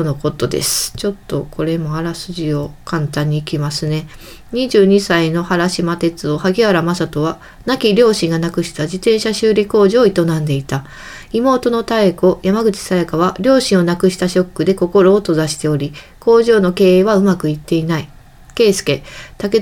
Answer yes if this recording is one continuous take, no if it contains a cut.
yes